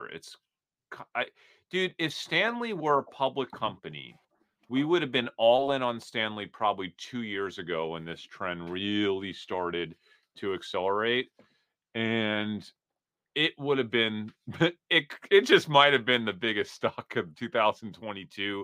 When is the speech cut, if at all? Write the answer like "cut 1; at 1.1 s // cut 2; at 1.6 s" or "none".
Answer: none